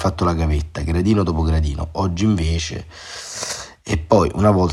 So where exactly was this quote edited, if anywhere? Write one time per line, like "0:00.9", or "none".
none